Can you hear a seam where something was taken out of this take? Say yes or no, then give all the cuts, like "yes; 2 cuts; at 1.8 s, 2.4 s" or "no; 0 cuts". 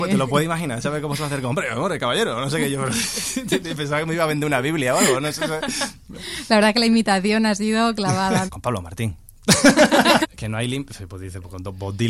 yes; 2 cuts; at 8.5 s, 10.2 s